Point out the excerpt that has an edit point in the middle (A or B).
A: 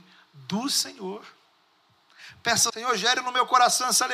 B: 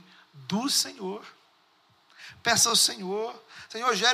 A